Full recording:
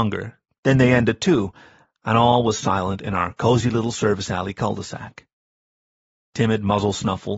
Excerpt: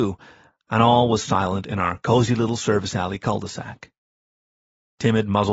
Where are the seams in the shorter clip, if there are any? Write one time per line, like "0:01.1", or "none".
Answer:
none